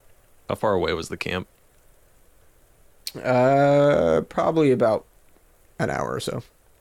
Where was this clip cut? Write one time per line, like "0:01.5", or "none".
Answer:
none